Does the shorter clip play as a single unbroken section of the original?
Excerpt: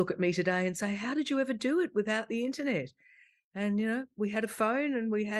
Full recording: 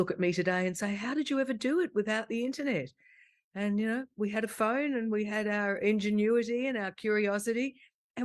yes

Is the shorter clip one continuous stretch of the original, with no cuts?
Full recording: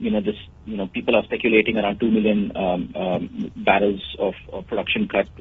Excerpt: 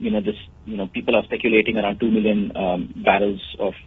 no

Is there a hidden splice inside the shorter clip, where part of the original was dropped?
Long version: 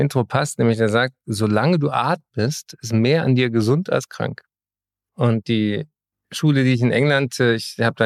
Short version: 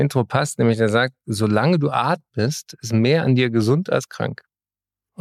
no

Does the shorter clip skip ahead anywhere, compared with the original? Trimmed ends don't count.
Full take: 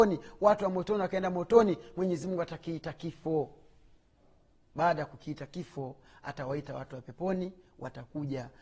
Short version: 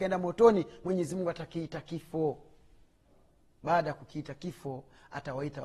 no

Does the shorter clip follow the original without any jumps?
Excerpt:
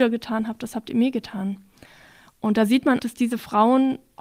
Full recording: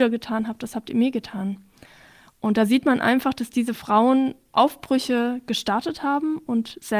no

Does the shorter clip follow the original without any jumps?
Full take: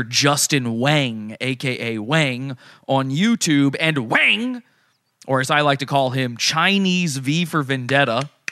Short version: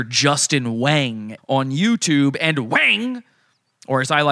no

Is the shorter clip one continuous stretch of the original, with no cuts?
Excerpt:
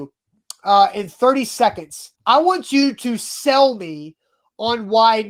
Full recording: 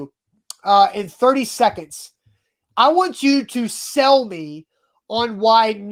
no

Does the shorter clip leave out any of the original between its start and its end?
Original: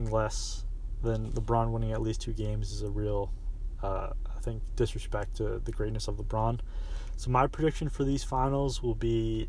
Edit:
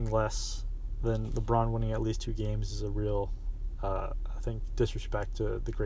no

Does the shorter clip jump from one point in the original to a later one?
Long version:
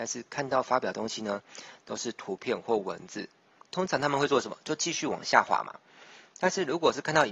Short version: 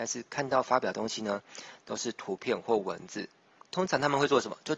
no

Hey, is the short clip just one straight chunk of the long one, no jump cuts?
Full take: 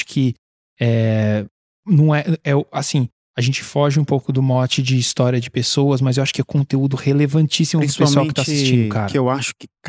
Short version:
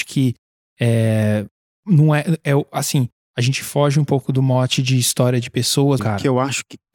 no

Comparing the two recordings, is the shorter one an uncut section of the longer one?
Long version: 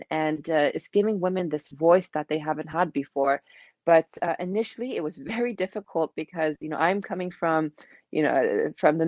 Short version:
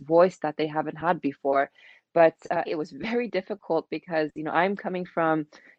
no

